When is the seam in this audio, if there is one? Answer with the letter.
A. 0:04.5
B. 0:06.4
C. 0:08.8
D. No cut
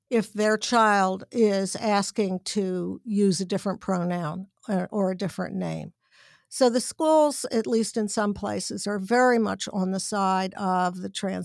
D